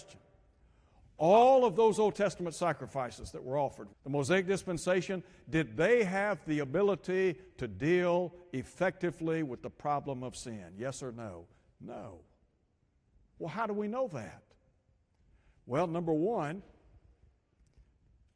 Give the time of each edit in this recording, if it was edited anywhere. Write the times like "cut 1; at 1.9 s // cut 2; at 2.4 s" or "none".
cut 1; at 3.9 s